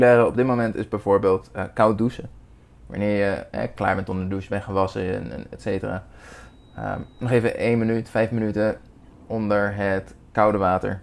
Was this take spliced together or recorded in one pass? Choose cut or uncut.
uncut